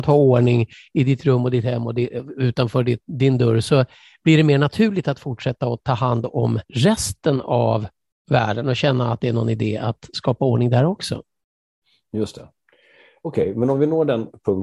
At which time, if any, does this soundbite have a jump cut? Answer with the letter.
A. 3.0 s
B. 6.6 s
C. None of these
B